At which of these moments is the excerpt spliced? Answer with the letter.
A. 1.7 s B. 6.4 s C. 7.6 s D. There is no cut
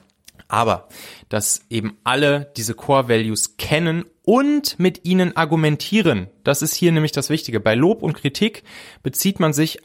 D